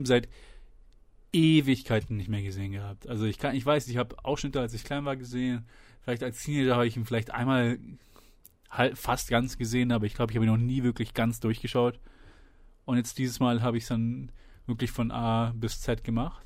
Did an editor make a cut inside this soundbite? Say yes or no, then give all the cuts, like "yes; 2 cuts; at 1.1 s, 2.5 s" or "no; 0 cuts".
no; 0 cuts